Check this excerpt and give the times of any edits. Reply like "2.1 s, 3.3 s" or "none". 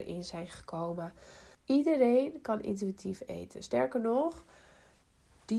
1.5 s